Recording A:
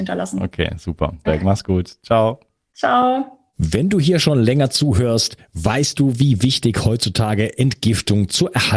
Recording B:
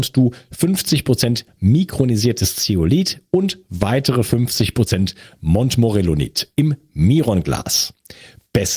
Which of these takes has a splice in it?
A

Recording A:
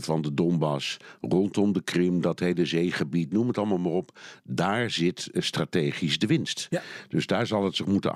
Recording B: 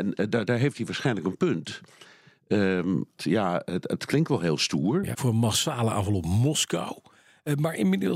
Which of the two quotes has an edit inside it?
B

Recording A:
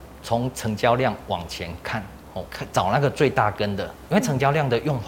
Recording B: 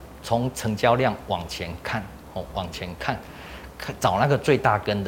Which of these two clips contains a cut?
A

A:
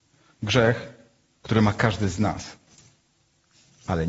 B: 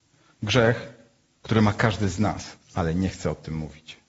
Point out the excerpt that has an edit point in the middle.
B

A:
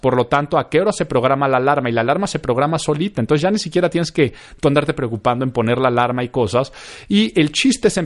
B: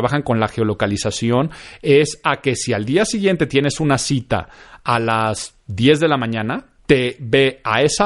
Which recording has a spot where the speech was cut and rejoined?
B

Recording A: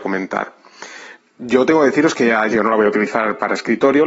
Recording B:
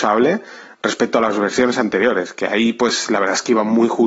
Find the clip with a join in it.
A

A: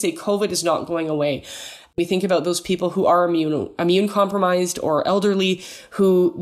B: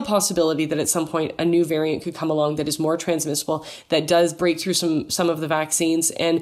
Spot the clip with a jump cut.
A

